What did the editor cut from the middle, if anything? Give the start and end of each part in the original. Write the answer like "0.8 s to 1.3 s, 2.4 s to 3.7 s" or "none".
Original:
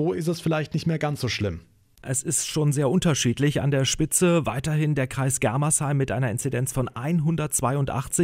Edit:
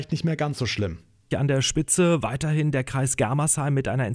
1.9 s to 3.5 s

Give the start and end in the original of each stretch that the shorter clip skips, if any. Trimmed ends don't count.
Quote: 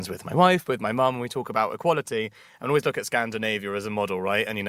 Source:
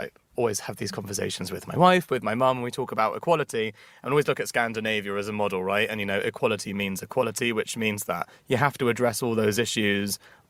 none

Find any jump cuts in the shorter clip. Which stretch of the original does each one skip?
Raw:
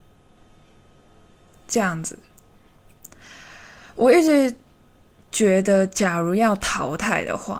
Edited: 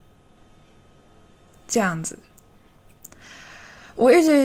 none

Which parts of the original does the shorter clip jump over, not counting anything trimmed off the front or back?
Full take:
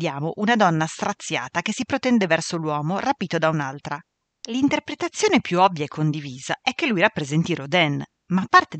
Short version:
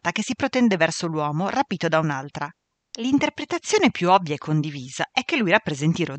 none

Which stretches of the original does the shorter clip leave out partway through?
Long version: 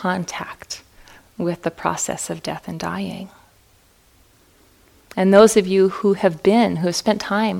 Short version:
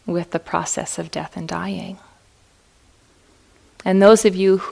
none

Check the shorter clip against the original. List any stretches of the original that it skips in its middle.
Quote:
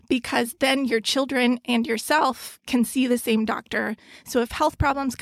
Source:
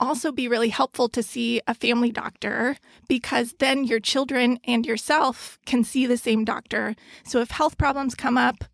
none

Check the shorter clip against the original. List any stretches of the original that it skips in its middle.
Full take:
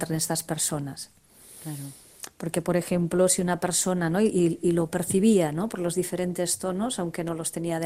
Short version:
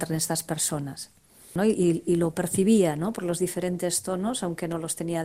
1.6 s to 4.1 s

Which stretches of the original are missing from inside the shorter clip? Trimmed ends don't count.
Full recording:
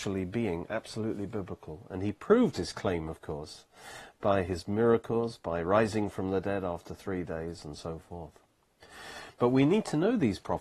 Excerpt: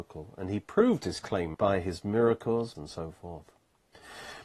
3.1 s to 4.2 s, 5.4 s to 7.6 s

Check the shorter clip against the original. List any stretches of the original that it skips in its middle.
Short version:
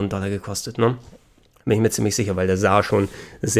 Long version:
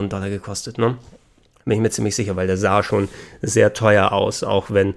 none

